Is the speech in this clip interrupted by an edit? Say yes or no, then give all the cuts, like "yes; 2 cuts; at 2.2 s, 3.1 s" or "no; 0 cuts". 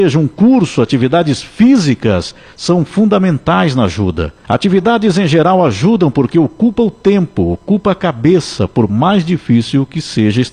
yes; 1 cut; at 4.4 s